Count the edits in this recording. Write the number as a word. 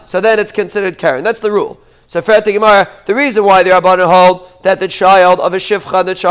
zero